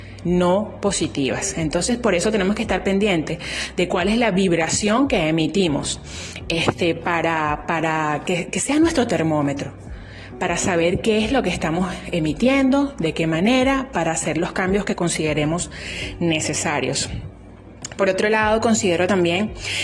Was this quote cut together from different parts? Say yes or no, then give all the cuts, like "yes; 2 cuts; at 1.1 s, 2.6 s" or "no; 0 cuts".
no; 0 cuts